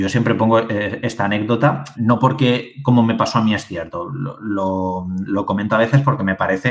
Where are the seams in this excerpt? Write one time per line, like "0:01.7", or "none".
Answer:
0:01.9